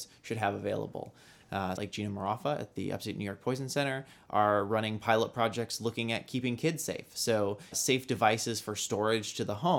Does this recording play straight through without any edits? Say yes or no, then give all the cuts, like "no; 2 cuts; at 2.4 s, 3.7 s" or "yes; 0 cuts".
no; 2 cuts; at 1.8 s, 7.7 s